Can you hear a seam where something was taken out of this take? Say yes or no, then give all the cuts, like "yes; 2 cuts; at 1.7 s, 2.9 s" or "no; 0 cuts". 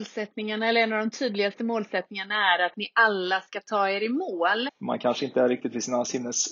yes; 1 cut; at 4.7 s